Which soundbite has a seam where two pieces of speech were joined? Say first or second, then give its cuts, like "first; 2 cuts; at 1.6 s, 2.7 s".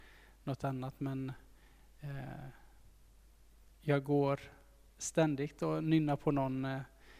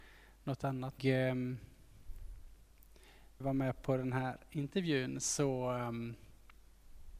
second; 2 cuts; at 1.0 s, 3.4 s